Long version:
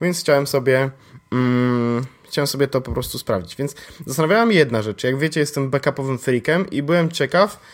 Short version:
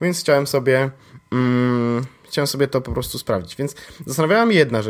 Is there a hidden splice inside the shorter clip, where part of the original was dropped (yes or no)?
no